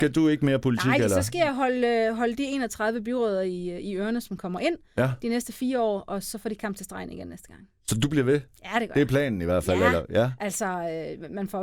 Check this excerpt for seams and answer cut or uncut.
uncut